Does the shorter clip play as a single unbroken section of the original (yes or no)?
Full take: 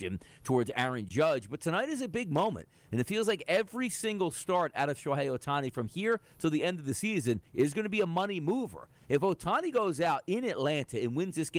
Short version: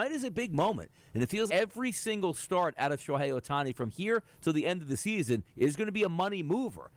no